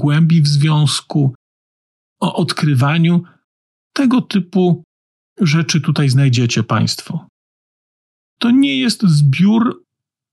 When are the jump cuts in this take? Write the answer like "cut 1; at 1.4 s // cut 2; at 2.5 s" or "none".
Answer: none